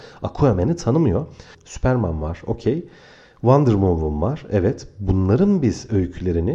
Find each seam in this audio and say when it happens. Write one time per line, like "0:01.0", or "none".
0:01.5

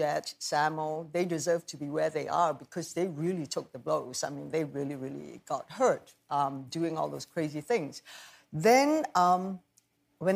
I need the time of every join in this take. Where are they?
none

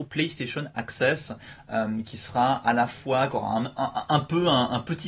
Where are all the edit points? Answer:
none

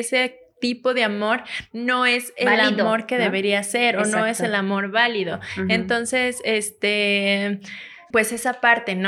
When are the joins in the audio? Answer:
0:08.1

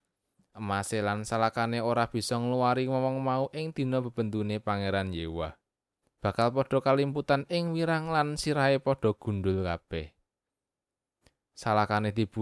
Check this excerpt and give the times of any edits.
0:06.0

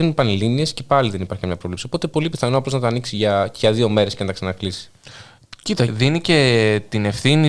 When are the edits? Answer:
0:05.9

